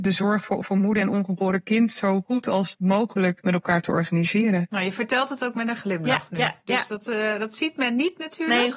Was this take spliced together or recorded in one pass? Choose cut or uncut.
uncut